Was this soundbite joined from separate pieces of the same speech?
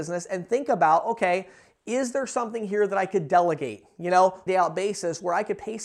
yes; 1 cut; at 4.5 s

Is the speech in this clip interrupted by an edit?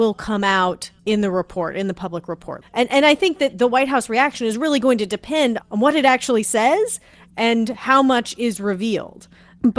yes; 2 cuts; at 1.0 s, 5.6 s

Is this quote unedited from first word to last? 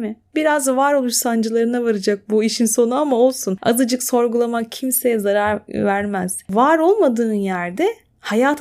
yes; 0 cuts

